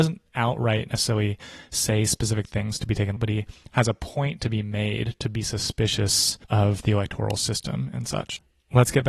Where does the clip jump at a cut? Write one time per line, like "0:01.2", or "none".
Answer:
0:03.2
0:06.4